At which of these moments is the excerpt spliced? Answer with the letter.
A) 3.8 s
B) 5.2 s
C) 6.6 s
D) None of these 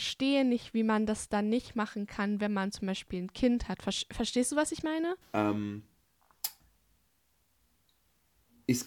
B